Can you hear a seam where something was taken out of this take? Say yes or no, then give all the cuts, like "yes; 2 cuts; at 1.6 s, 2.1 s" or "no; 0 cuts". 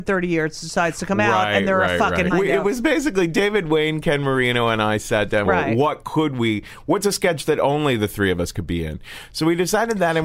yes; 2 cuts; at 2.3 s, 5.5 s